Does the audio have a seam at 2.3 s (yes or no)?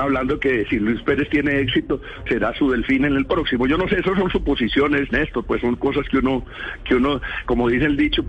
yes